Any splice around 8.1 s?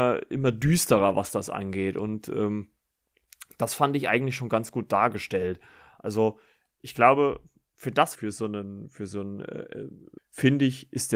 yes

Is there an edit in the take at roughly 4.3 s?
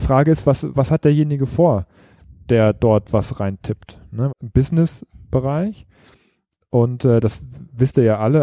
yes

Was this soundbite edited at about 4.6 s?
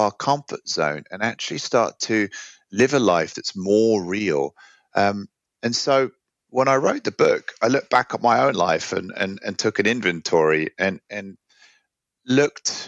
no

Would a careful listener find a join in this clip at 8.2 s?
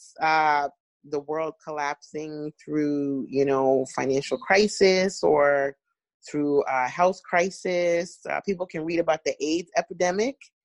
no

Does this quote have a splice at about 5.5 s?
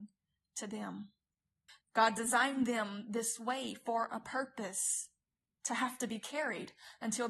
no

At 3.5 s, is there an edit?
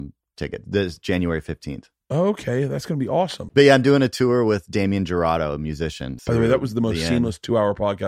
yes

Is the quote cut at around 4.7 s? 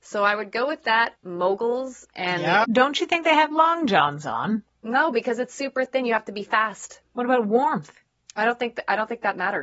no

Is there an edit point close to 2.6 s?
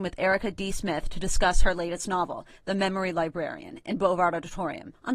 no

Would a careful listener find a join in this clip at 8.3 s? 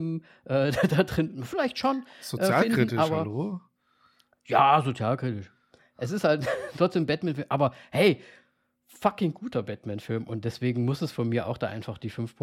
no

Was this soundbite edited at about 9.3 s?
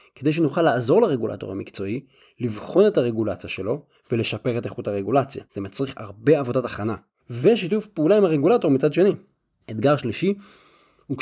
no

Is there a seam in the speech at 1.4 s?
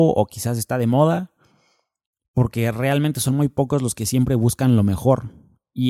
no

